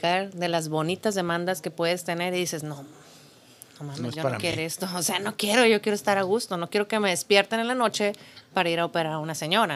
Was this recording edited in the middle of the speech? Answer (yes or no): no